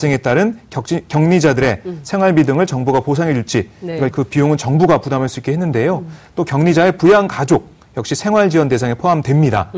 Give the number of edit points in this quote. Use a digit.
1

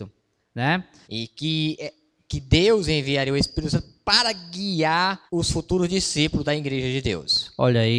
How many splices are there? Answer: 2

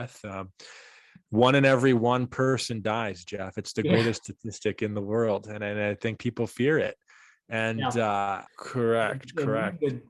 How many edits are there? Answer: 1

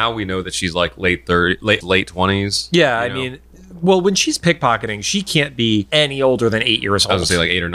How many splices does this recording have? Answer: 1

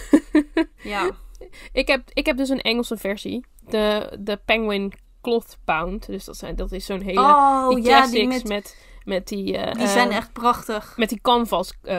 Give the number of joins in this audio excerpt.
1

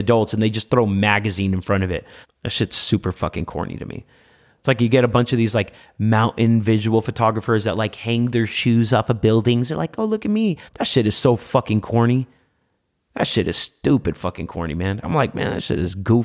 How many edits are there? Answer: 3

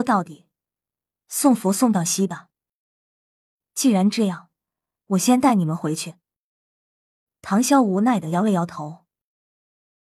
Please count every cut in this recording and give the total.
1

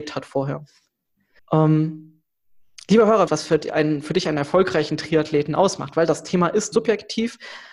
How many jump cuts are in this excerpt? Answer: 3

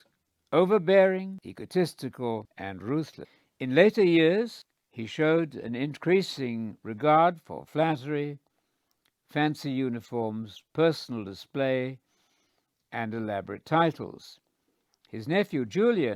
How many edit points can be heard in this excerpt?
1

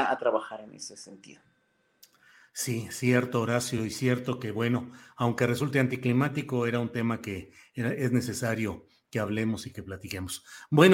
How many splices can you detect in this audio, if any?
0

